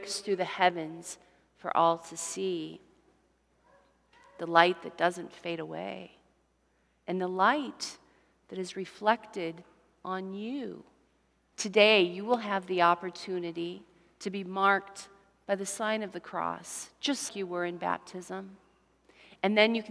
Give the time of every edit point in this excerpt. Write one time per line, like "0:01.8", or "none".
0:11.5
0:17.3